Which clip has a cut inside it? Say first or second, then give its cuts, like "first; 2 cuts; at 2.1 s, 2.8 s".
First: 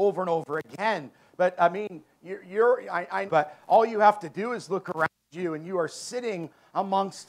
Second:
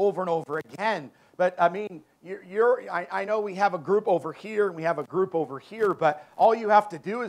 first; 1 cut; at 3.3 s